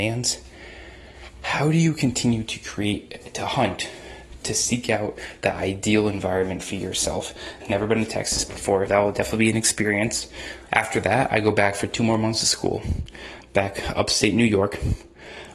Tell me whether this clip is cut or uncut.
cut